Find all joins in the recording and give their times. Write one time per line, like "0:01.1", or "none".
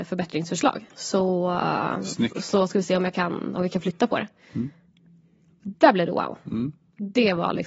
none